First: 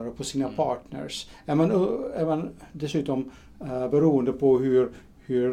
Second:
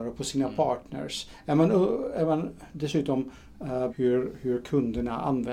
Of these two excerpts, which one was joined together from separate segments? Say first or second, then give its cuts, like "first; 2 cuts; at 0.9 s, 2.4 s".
second; 1 cut; at 3.9 s